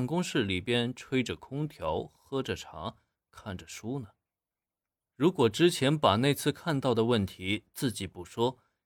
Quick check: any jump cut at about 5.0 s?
yes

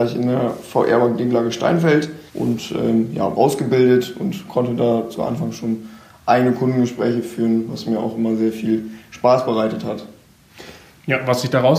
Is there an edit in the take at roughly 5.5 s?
no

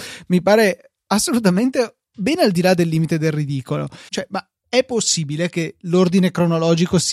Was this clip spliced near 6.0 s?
no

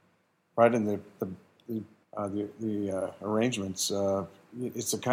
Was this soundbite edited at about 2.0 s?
yes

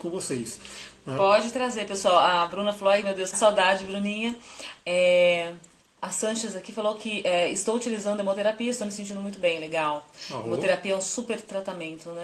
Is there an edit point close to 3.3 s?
yes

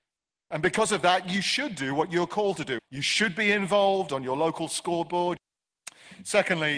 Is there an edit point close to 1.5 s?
no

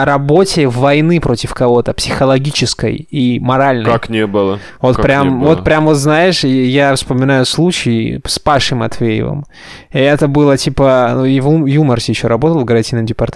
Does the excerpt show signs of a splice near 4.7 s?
no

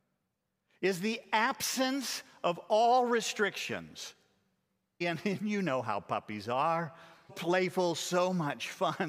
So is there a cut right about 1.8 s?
no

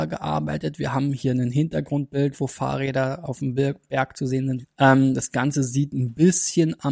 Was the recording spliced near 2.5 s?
no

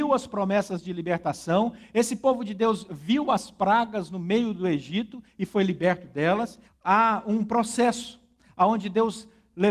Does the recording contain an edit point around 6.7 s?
yes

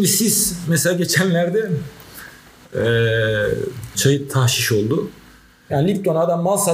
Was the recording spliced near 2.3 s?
no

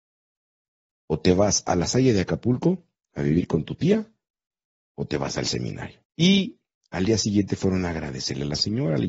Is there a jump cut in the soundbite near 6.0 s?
yes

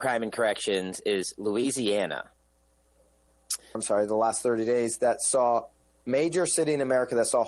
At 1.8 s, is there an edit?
no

